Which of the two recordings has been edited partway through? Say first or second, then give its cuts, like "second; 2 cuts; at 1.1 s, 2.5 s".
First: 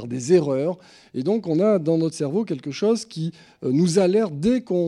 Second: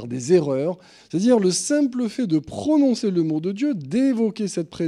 second; 1 cut; at 1.0 s